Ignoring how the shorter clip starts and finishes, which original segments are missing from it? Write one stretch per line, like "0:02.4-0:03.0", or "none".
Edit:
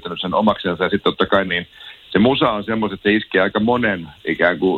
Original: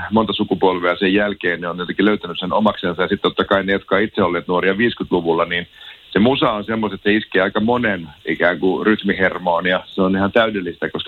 0:03.6-0:05.5